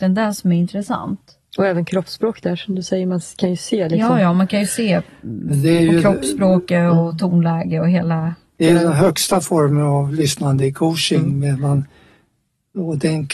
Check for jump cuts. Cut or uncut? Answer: uncut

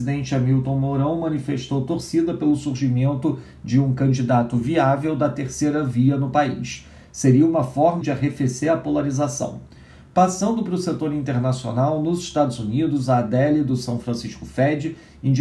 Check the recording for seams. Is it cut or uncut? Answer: cut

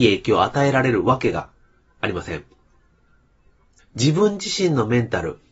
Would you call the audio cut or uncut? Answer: cut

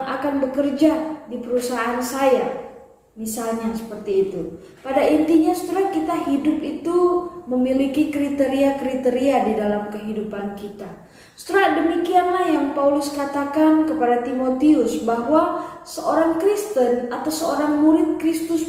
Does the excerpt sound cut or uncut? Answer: uncut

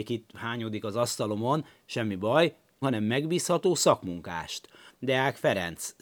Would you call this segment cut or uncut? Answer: cut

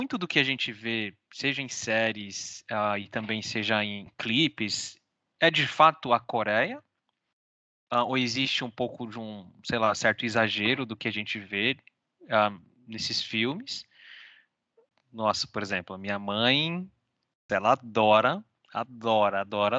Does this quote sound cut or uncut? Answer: cut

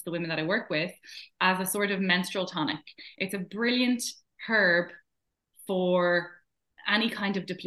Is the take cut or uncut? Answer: uncut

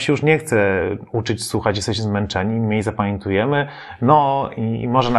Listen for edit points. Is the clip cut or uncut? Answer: uncut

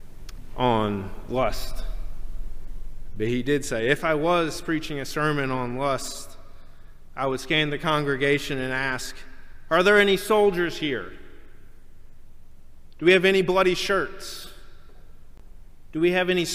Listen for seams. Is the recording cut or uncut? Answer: uncut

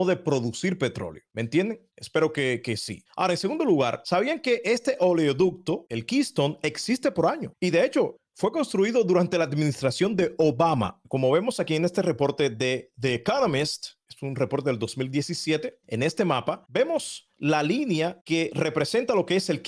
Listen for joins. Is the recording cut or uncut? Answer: cut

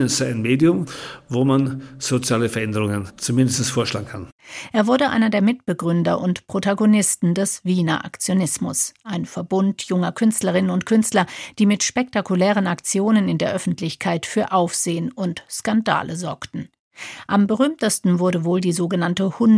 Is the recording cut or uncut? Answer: uncut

